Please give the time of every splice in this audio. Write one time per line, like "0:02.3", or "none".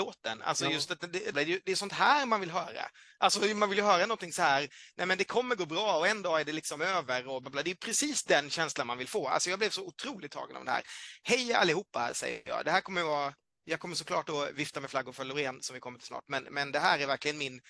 0:01.3
0:07.4